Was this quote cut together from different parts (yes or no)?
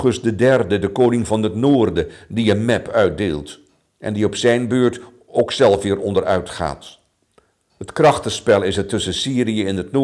no